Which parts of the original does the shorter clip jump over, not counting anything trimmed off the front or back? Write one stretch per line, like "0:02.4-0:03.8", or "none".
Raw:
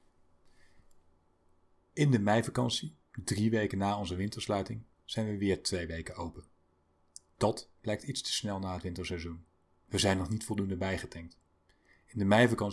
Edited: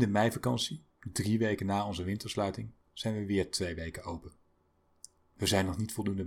0:07.3-0:09.7